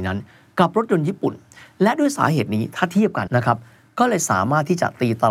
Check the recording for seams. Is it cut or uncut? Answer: cut